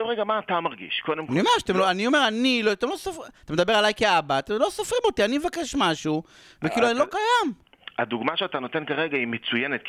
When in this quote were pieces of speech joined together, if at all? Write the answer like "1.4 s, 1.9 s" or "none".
none

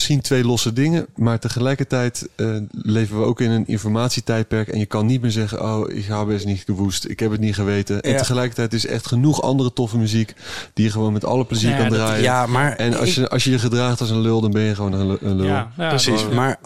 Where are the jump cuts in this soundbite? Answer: none

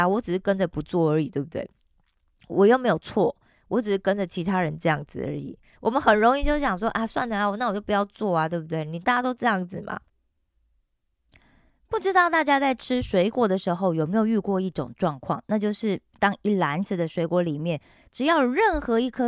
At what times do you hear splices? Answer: 5.7 s

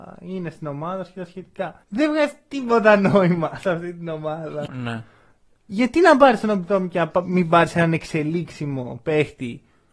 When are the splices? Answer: 1.8 s, 4.7 s

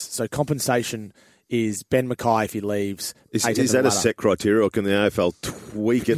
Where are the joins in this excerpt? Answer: 3.3 s

